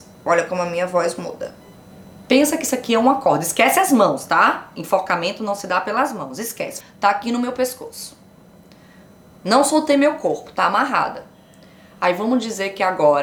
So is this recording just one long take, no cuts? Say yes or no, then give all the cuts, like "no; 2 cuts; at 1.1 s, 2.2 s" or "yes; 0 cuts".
no; 2 cuts; at 2.2 s, 6.8 s